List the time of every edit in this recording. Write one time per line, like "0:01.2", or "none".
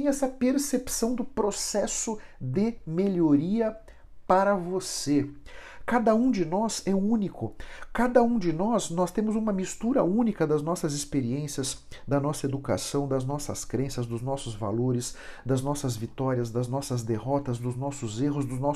none